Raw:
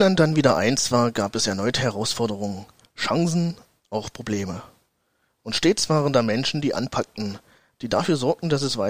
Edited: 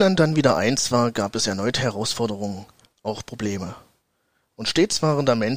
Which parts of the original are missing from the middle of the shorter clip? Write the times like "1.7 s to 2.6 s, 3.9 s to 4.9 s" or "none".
2.9 s to 3.8 s